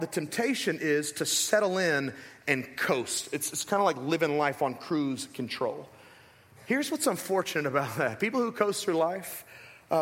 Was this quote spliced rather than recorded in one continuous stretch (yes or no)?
no